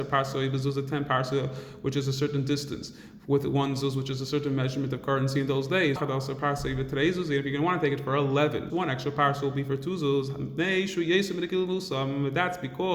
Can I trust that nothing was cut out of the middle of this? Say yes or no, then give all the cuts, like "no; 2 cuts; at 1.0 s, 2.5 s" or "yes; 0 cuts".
no; 2 cuts; at 6.0 s, 8.7 s